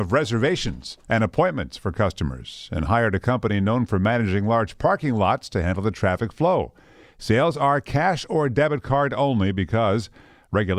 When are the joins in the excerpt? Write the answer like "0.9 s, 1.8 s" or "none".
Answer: none